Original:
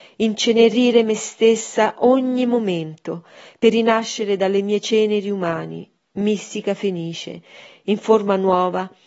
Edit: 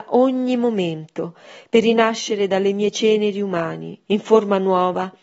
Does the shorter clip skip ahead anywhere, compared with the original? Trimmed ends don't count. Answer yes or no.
yes